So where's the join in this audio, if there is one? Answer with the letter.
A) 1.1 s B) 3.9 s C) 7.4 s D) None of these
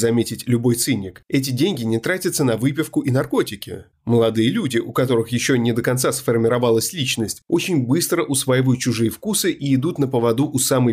B